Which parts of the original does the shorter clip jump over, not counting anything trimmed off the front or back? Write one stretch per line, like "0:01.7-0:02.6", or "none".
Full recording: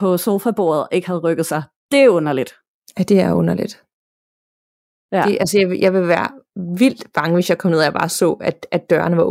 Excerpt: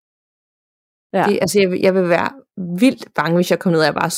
none